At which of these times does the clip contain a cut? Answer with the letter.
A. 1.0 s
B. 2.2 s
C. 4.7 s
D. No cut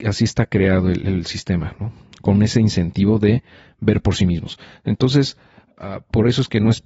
D